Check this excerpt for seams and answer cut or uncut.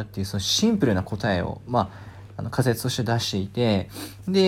uncut